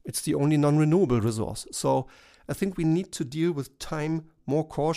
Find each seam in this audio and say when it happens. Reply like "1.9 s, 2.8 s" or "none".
none